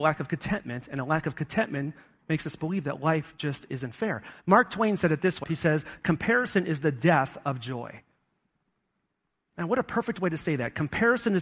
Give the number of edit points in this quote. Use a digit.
1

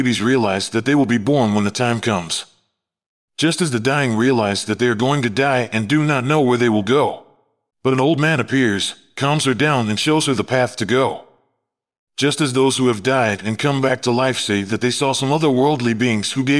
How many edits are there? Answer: 1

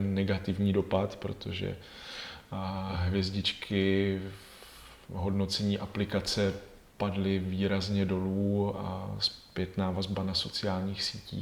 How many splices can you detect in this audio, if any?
0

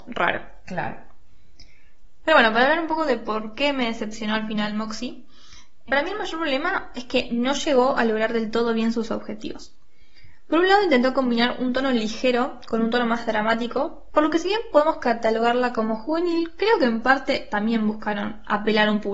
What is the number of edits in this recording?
2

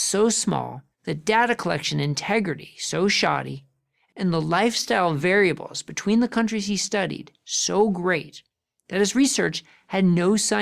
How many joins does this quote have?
1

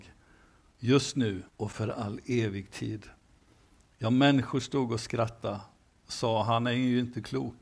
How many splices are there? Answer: 1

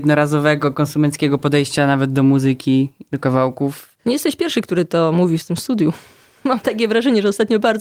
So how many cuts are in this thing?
1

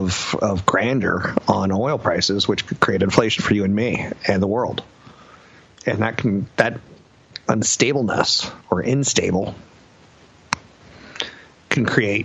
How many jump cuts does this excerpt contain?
2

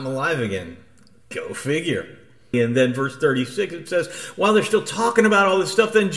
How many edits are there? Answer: 1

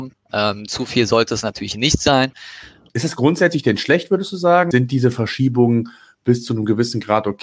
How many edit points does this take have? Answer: 2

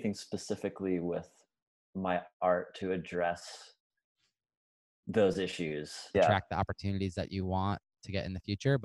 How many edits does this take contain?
1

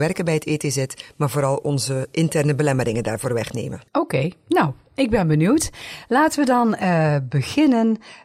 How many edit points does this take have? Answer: 1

